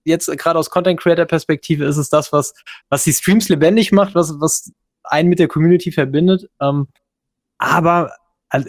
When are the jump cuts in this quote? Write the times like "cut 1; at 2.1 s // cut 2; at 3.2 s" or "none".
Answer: none